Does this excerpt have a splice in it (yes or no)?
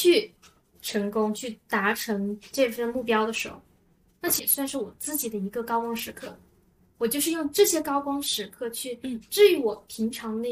no